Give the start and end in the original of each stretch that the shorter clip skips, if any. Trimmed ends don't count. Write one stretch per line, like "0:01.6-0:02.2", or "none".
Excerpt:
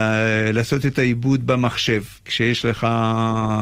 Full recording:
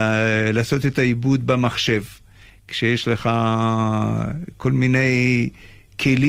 0:02.2-0:02.6